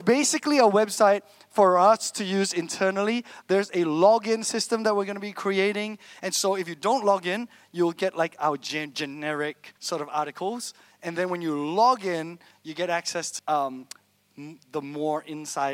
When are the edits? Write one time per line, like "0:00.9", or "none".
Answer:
0:09.8
0:13.4